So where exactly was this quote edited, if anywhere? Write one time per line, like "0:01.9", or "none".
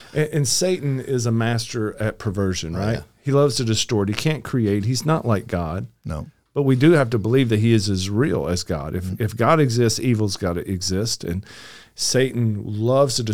none

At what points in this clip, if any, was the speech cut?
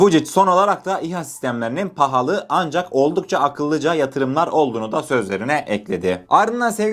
none

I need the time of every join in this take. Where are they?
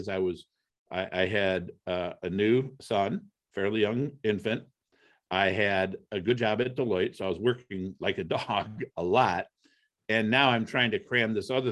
none

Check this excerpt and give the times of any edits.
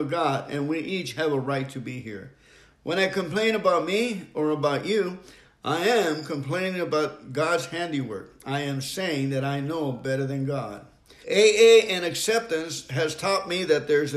0:11.2

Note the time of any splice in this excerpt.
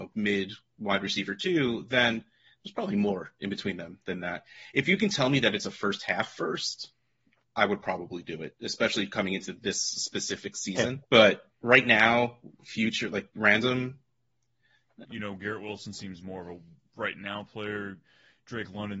0:11.0
0:15.0

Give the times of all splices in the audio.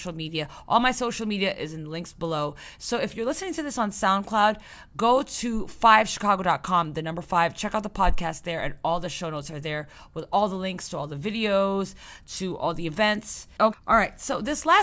0:13.7

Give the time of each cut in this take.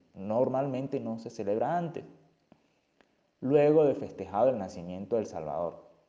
none

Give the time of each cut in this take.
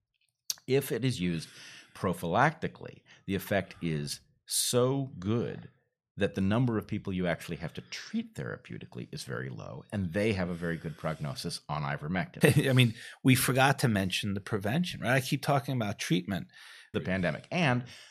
0:12.4
0:16.9

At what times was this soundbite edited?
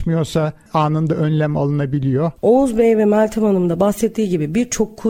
0:02.4

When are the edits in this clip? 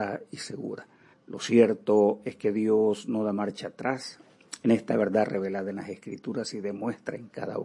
0:01.1

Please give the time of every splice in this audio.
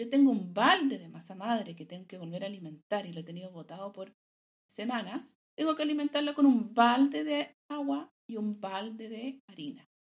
0:05.4

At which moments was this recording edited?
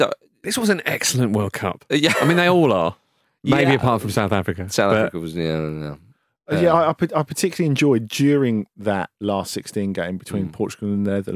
none

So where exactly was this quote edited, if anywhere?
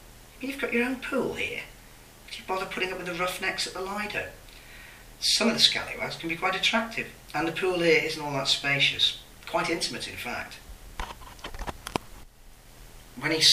none

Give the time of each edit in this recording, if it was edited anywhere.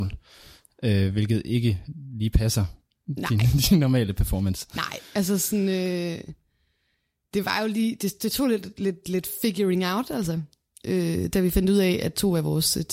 none

